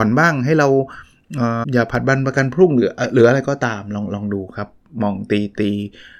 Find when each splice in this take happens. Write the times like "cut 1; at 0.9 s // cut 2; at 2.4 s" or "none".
cut 1; at 1.6 s